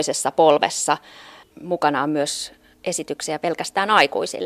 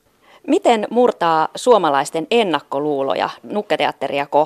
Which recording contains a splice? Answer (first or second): first